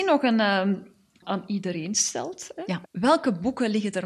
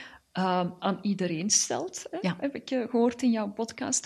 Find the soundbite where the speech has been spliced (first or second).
first